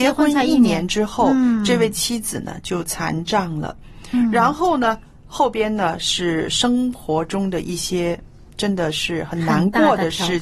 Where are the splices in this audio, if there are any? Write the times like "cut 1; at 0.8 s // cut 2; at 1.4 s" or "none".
none